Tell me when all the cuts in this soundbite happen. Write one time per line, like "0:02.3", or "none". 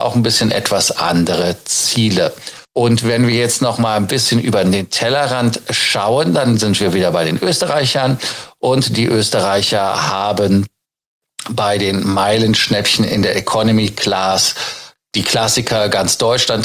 0:02.6